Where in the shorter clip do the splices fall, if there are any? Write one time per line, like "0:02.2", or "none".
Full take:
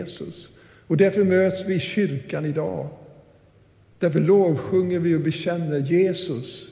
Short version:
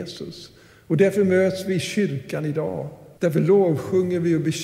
0:03.1